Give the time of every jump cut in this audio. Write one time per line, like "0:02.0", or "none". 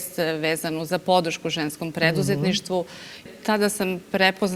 0:03.3